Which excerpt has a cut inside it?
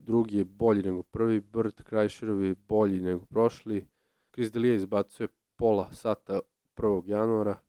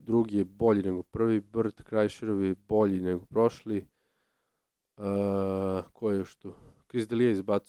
first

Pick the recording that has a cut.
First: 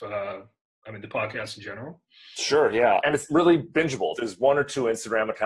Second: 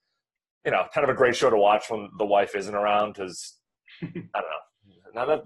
first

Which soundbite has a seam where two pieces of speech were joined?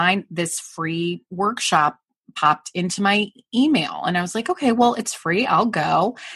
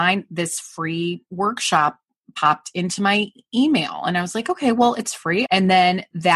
second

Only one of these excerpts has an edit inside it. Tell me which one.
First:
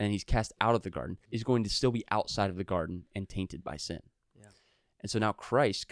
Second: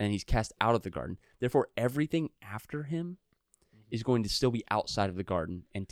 first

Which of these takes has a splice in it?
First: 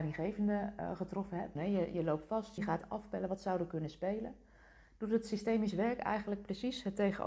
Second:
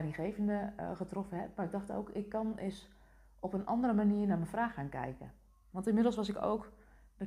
first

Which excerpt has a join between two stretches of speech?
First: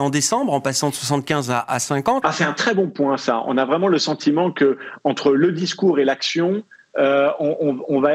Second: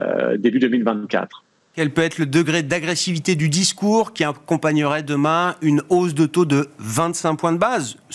first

